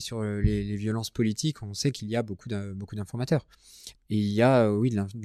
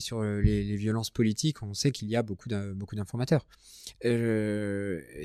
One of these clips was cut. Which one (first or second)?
first